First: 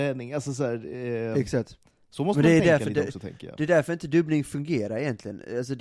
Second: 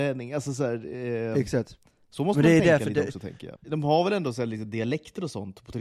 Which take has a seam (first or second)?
second